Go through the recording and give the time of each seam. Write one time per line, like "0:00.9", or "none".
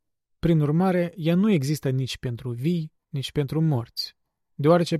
none